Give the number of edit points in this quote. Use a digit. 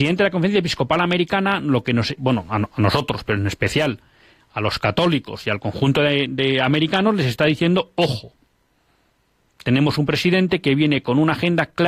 1